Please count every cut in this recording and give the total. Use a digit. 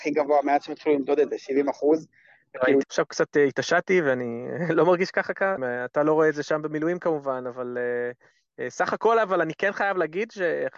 2